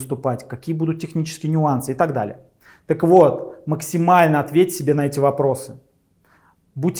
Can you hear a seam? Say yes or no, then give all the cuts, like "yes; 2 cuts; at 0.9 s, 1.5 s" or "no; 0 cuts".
no; 0 cuts